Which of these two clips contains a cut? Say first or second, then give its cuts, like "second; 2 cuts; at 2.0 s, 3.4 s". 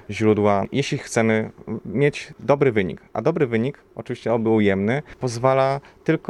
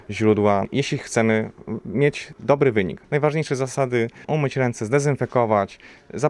second; 2 cuts; at 3.0 s, 4.2 s